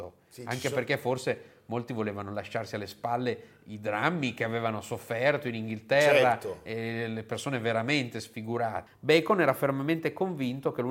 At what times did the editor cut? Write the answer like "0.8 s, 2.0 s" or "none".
8.9 s